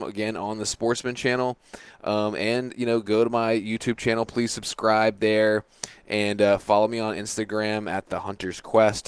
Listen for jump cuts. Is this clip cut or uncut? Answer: uncut